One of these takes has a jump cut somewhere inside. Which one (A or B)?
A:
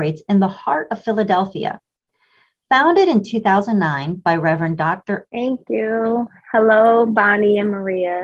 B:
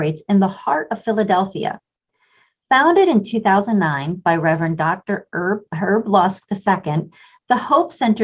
A